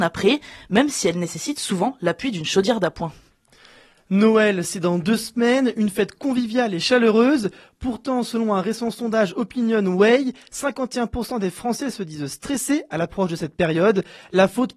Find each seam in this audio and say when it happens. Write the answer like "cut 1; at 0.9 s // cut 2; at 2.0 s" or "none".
none